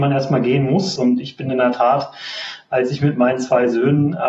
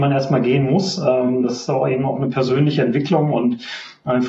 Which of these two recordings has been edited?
first; 1 cut; at 1.0 s

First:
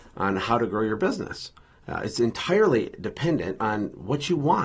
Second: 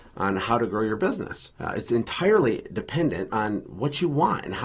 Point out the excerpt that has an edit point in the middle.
second; 1 cut; at 1.6 s

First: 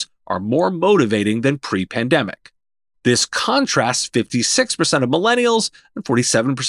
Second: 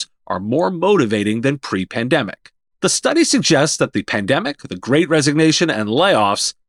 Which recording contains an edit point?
second; 2 cuts; at 2.7 s, 4.6 s

